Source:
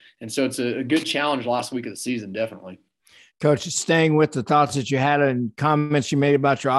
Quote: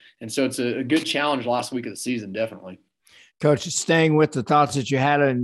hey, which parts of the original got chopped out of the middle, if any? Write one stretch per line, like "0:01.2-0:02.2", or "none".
none